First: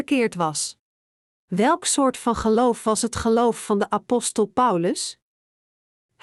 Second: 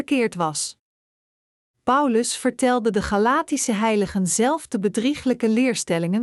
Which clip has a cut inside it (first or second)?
first